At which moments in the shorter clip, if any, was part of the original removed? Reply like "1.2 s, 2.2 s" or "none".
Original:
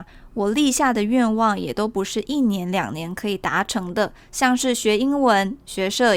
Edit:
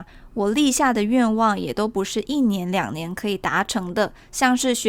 none